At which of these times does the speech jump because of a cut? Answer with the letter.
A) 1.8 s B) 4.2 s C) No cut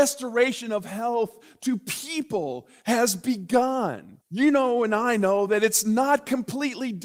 B